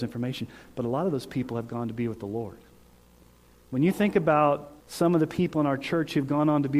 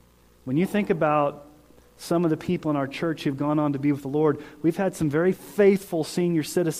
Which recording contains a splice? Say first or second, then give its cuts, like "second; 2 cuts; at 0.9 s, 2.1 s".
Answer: first; 1 cut; at 4.8 s